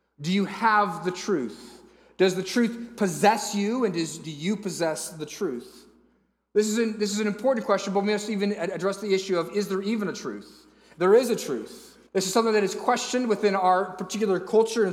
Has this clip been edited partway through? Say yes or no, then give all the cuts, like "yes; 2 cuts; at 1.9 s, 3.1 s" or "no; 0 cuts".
yes; 1 cut; at 12.1 s